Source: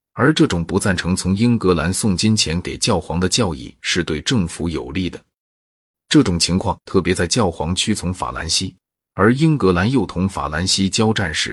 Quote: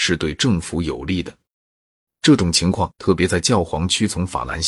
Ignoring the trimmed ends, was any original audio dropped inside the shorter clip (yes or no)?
no